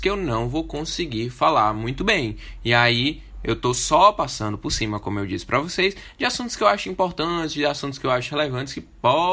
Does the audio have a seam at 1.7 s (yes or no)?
no